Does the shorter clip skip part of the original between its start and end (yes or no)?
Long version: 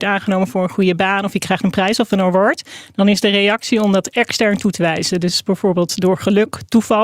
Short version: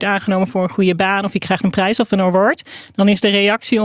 no